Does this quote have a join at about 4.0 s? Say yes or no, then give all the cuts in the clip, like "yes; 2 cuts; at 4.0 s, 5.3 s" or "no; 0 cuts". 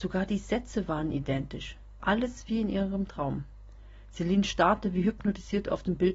no; 1 cut; at 2.0 s